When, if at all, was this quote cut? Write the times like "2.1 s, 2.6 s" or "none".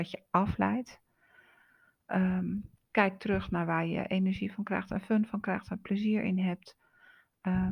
none